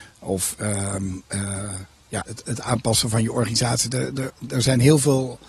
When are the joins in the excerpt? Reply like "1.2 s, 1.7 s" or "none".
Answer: 2.3 s